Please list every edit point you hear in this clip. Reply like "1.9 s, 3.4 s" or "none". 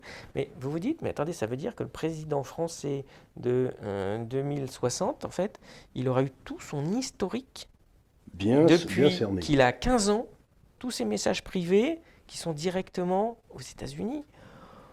10.8 s